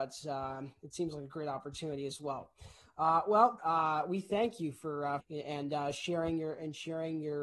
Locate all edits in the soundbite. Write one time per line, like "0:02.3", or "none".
0:03.6
0:05.2